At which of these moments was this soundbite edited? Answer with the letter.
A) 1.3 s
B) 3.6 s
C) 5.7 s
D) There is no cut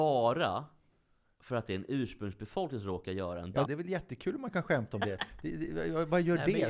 B